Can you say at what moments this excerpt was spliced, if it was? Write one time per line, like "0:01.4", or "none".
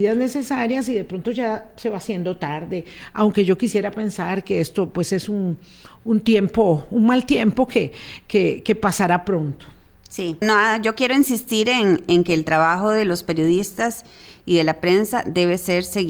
0:10.4